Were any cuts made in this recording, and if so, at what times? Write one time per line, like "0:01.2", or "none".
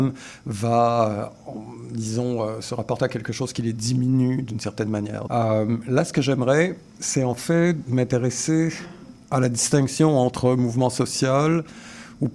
0:05.3